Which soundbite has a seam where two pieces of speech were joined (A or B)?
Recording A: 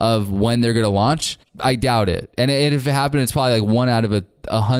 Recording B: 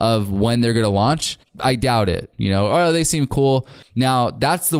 B